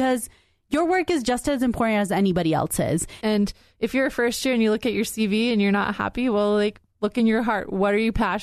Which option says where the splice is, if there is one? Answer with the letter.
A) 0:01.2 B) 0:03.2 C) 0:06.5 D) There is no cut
B